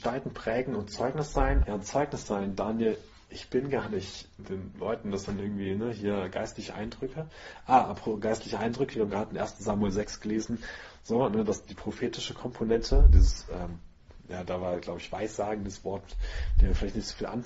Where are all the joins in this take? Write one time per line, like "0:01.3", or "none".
0:01.6
0:04.4